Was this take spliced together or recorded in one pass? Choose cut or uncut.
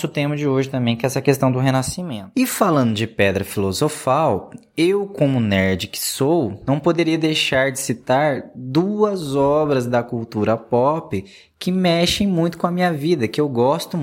uncut